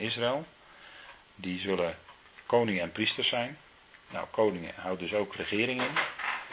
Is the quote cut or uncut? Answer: uncut